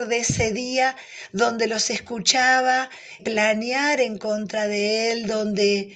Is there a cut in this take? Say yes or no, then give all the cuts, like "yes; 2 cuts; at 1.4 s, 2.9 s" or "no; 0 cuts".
yes; 1 cut; at 3.2 s